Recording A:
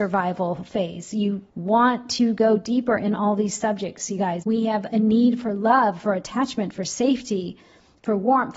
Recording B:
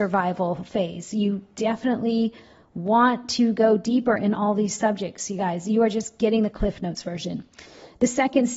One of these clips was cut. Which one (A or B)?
A